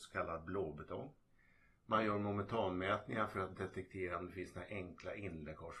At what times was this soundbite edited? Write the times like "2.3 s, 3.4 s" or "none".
none